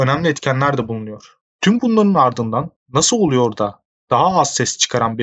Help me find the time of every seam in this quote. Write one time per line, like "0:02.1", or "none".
0:01.5

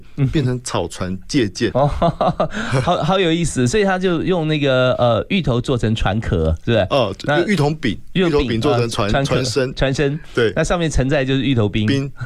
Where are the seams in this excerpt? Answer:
0:01.7

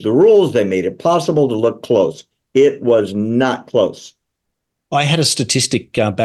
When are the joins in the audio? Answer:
none

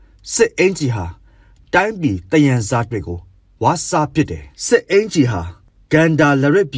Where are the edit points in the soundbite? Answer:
0:02.9
0:04.5

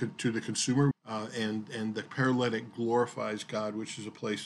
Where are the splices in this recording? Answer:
0:00.9

